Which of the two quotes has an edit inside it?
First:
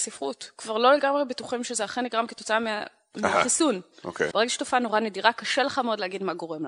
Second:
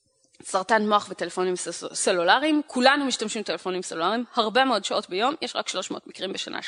first; 1 cut; at 4.3 s

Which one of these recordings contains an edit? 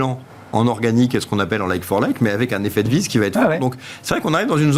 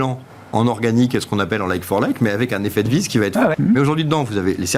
second; 1 cut; at 3.5 s

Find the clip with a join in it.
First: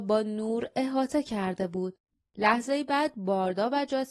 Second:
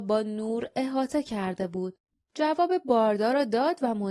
first; 1 cut; at 2.2 s

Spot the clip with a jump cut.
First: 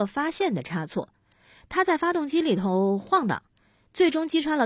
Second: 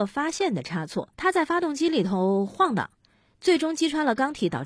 second; 1 cut; at 1.1 s

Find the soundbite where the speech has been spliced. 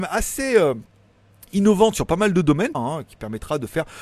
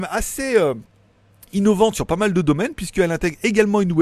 first; 1 cut; at 2.7 s

